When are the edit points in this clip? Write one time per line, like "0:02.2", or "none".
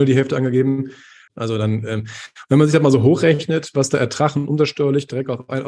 0:01.3